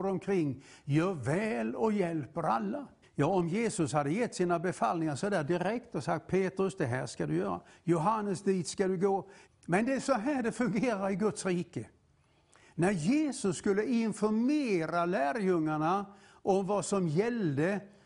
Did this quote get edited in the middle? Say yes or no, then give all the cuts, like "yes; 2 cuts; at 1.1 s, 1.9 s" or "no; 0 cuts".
yes; 2 cuts; at 3.0 s, 9.5 s